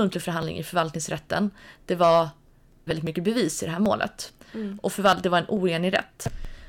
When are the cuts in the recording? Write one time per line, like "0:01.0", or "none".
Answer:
0:02.9